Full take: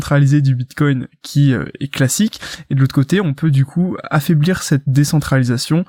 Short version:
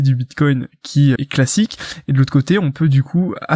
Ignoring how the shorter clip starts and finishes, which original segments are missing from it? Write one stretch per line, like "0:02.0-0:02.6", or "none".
0:01.6-0:01.8